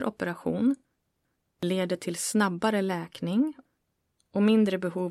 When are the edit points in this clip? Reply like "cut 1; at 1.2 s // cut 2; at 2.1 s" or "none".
none